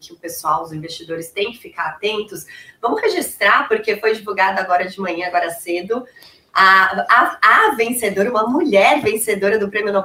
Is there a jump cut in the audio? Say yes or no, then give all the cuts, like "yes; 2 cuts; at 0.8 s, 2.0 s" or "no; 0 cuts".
no; 0 cuts